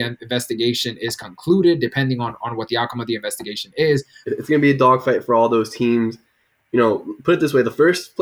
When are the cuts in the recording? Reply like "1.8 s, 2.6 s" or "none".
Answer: 4.2 s